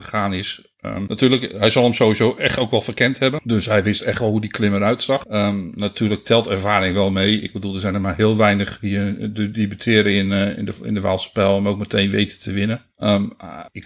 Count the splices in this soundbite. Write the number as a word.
zero